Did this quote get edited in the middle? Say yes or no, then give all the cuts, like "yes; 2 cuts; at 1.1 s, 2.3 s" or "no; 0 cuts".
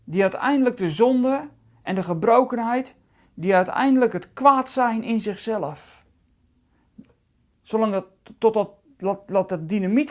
no; 0 cuts